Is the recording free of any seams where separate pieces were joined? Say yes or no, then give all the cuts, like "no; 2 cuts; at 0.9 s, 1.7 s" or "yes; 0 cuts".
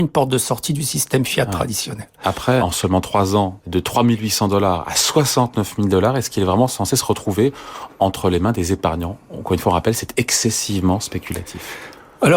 no; 1 cut; at 2.6 s